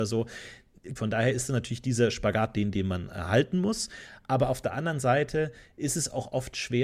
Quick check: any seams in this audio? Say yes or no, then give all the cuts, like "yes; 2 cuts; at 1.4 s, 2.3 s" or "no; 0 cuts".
yes; 1 cut; at 1.0 s